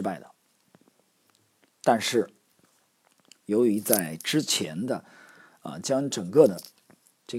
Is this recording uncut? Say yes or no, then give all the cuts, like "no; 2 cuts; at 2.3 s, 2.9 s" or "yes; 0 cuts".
yes; 0 cuts